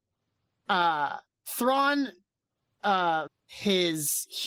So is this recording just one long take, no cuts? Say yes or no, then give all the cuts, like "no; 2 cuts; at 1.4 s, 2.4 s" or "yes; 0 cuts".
no; 1 cut; at 3.3 s